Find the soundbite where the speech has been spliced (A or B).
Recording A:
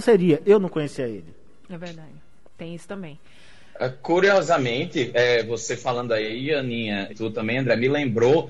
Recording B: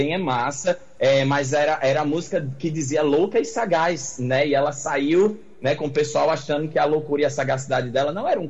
A